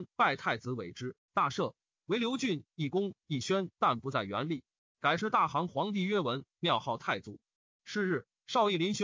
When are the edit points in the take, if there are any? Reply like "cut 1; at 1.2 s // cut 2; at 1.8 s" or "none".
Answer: cut 1; at 4.8 s // cut 2; at 7.8 s